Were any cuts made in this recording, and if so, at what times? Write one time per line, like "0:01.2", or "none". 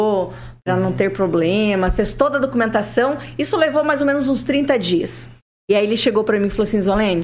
none